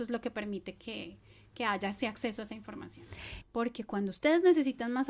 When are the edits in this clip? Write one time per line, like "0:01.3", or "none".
0:03.4